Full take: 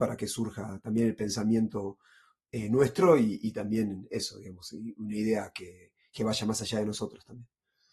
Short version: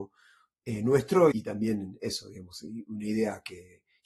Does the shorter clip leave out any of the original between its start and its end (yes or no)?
yes